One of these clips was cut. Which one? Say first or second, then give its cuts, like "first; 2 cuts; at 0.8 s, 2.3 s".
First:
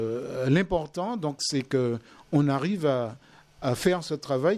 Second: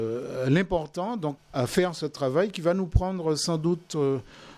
second; 1 cut; at 1.4 s